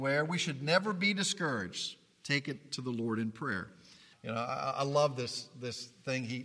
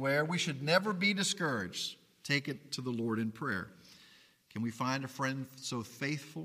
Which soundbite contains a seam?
first; 1 cut; at 4.1 s

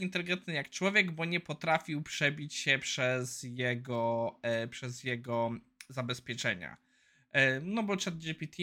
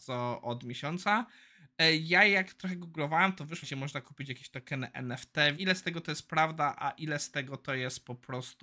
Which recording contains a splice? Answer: second; 2 cuts; at 3.6 s, 5.6 s

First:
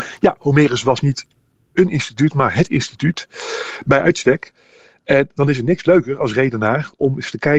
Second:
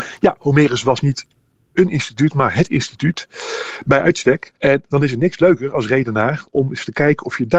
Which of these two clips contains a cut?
second; 1 cut; at 4.6 s

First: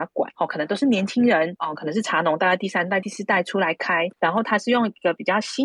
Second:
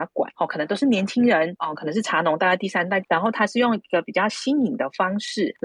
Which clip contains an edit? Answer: second; 1 cut; at 3.0 s

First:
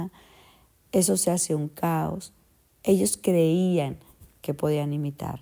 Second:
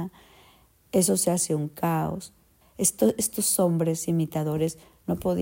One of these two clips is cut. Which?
second; 1 cut; at 2.6 s

